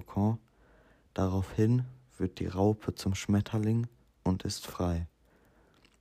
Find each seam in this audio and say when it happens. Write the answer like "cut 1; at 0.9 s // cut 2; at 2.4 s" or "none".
none